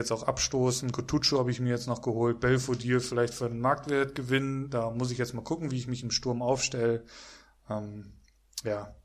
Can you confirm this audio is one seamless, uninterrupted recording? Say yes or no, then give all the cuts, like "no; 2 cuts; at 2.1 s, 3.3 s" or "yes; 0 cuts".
yes; 0 cuts